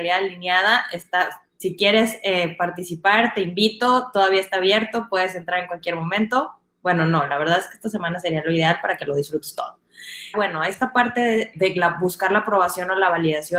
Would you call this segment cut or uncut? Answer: cut